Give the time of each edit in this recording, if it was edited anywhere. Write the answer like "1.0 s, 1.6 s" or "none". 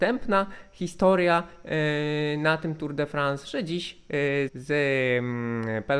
4.5 s